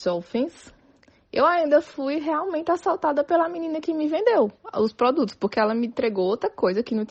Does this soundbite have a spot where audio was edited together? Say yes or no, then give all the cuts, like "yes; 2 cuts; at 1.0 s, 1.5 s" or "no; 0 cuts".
no; 0 cuts